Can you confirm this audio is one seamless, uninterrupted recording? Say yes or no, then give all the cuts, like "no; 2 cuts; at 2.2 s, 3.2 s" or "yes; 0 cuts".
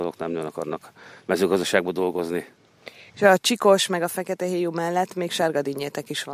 yes; 0 cuts